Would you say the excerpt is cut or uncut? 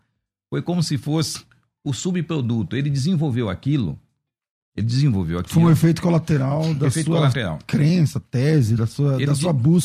uncut